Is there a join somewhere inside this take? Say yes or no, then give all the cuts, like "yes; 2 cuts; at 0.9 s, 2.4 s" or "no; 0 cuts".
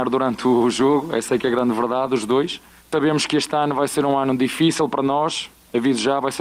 yes; 1 cut; at 2.8 s